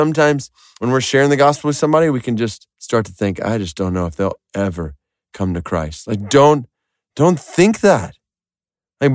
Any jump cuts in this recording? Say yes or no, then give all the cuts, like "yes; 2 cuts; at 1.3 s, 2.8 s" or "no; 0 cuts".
yes; 1 cut; at 2.7 s